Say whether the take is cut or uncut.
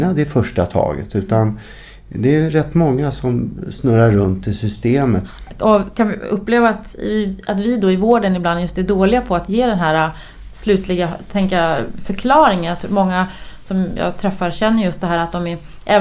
uncut